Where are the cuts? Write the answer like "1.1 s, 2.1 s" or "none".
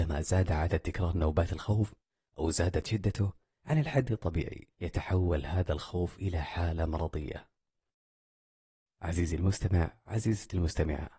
4.7 s